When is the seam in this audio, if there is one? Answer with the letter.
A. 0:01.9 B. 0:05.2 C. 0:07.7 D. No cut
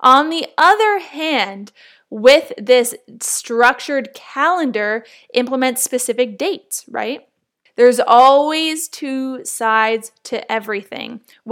C